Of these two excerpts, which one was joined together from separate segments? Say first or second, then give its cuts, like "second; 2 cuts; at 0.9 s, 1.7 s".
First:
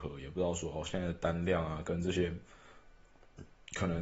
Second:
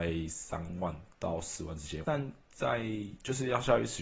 second; 1 cut; at 2.0 s